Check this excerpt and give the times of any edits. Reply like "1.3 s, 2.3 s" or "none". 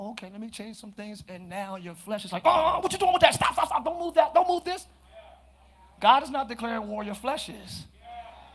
none